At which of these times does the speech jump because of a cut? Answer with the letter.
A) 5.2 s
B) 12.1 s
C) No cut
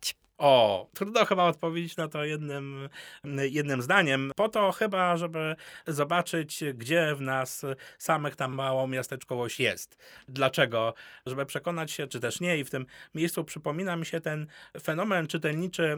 B